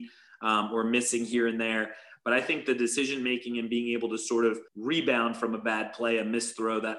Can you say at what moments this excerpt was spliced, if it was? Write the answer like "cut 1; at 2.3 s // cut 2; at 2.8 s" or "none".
cut 1; at 2.2 s // cut 2; at 4.7 s